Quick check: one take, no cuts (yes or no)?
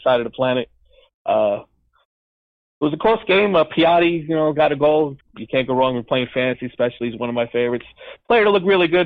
no